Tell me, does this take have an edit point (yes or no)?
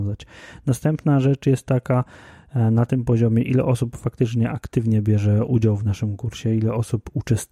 no